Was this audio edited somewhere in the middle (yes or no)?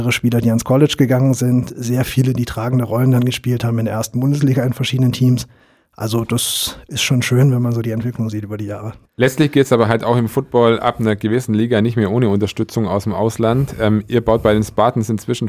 yes